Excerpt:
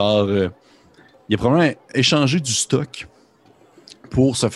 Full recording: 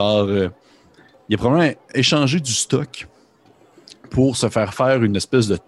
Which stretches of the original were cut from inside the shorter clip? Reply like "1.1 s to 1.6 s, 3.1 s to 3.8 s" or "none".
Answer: none